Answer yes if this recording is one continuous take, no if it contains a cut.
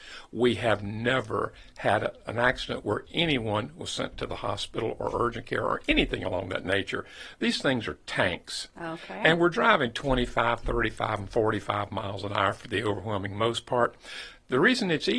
yes